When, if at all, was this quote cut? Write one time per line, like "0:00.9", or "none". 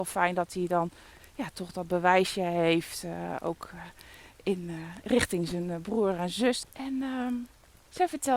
0:06.6

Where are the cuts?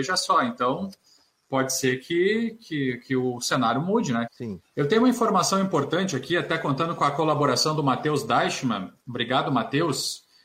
0:04.3
0:09.0

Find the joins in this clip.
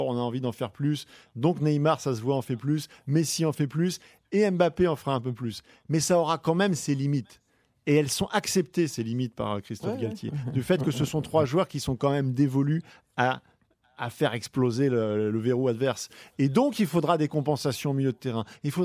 none

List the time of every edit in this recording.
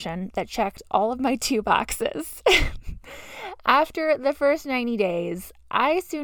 none

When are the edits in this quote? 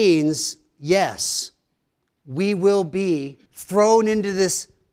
0:03.5

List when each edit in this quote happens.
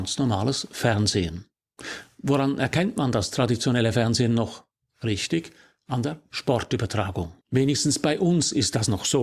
0:07.4

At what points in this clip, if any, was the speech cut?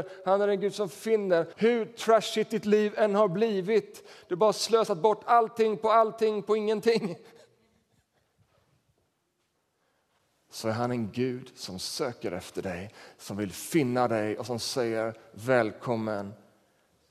0:01.5

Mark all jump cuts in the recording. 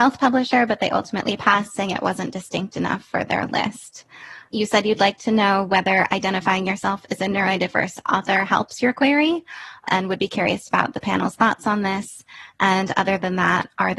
none

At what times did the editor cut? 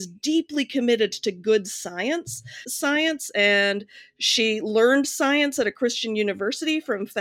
0:02.6

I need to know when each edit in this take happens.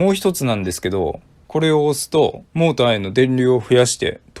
0:01.4
0:02.5

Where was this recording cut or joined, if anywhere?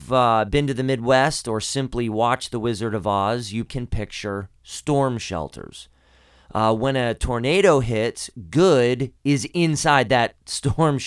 0:03.7

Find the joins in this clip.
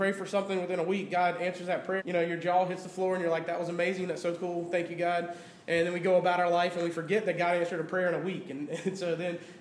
0:02.0

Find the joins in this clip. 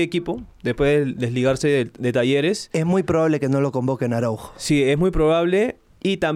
none

